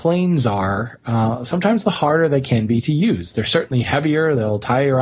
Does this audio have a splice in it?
no; 0 cuts

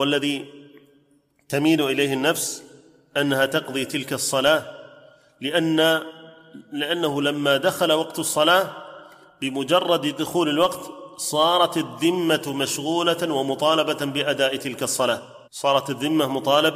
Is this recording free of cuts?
no; 1 cut; at 15.4 s

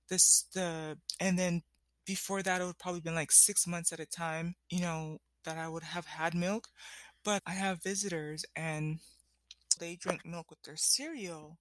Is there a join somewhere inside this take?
yes; 3 cuts; at 4.6 s, 7.4 s, 9.8 s

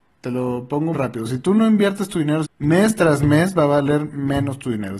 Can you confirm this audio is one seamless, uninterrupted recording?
no; 2 cuts; at 0.9 s, 2.4 s

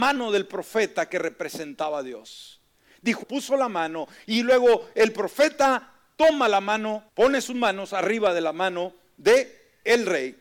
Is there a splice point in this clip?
yes; 2 cuts; at 3.2 s, 7.1 s

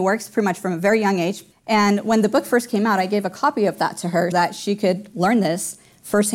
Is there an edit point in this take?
yes; 2 cuts; at 1.5 s, 4.3 s

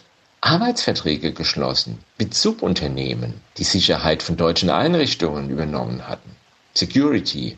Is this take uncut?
no; 1 cut; at 3.5 s

